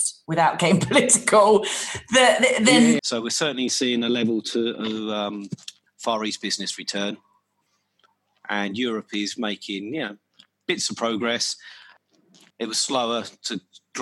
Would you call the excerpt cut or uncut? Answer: cut